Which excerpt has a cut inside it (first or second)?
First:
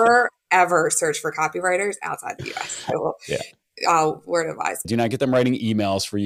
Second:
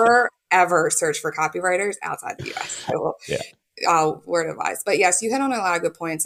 first